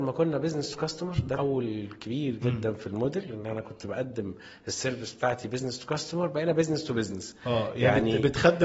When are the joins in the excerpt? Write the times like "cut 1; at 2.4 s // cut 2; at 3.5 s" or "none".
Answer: cut 1; at 1.4 s